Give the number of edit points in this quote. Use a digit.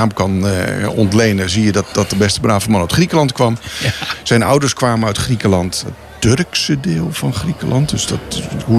0